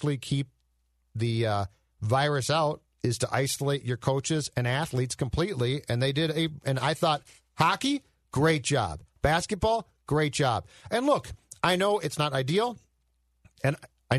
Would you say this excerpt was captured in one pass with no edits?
yes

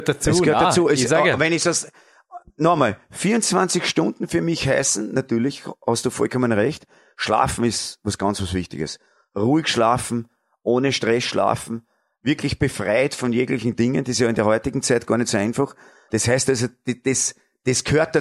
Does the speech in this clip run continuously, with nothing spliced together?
no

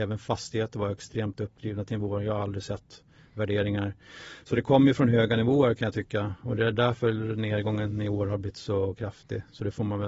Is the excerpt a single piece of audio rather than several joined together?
yes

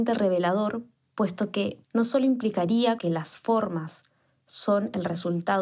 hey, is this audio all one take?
no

